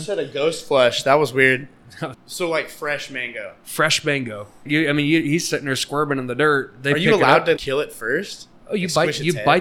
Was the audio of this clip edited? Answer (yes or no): yes